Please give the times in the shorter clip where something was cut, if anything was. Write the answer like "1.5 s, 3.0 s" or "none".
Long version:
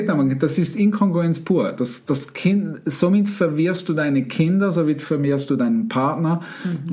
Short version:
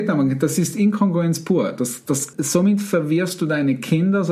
2.3 s